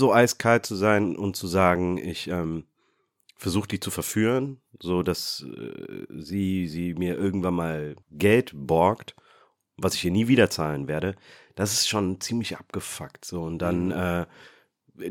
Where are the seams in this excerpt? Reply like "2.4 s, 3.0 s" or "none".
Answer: 8.0 s